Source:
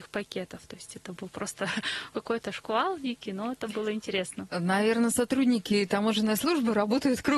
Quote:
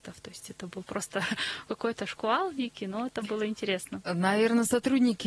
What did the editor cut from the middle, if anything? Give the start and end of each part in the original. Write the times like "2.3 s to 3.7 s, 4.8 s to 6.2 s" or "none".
none